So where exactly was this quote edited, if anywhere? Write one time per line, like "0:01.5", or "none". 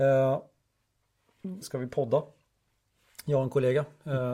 0:01.6